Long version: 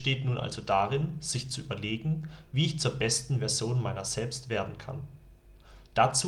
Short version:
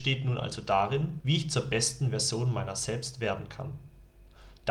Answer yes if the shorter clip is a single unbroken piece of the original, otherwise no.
no